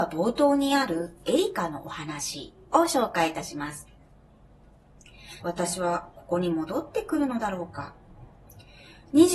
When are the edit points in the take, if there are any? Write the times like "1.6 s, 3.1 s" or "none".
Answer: 5.4 s